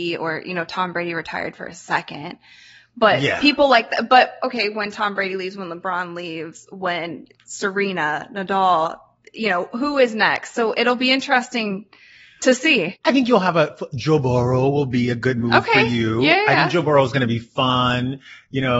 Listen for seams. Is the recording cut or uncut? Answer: uncut